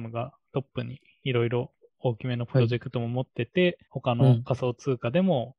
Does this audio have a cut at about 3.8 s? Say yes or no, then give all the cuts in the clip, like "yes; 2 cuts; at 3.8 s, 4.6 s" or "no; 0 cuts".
yes; 1 cut; at 3.8 s